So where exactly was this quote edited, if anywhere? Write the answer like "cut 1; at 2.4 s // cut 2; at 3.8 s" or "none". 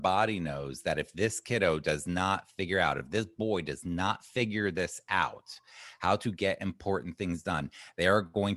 none